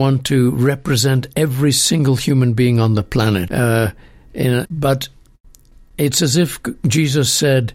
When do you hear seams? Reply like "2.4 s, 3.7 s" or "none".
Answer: 3.5 s, 4.6 s